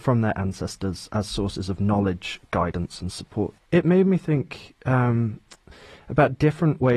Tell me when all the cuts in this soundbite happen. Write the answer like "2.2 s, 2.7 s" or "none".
none